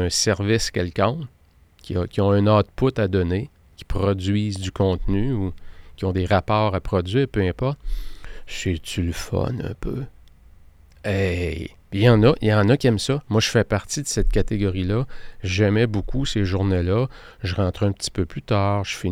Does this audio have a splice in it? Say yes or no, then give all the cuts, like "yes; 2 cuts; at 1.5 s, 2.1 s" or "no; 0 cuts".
no; 0 cuts